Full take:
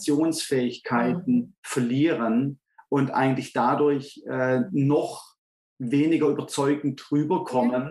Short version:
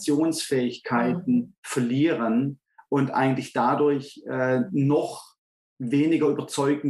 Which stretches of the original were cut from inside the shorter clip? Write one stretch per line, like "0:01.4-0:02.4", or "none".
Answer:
none